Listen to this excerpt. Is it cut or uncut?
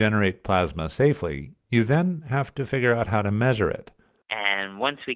cut